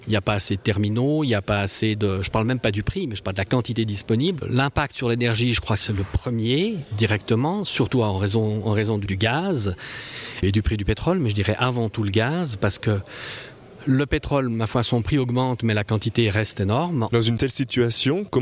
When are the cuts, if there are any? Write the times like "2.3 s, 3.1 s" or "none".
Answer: 4.4 s, 17.1 s